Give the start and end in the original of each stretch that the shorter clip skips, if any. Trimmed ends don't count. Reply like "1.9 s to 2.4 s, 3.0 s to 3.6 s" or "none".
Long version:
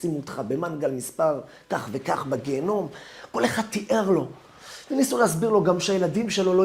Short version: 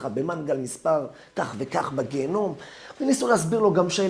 3.3 s to 4.9 s